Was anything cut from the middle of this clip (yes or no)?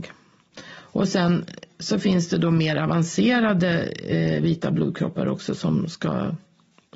no